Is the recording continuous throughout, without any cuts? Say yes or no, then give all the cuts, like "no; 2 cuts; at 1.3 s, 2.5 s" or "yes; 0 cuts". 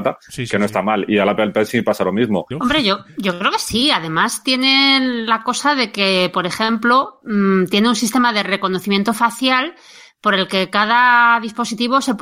no; 1 cut; at 2.5 s